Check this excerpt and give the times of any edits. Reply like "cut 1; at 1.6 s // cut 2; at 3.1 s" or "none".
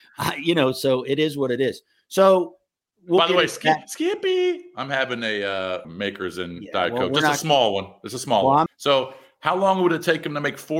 cut 1; at 5.8 s // cut 2; at 8.7 s